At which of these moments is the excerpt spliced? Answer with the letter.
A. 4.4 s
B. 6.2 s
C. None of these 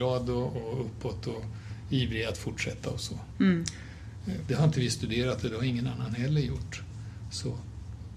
A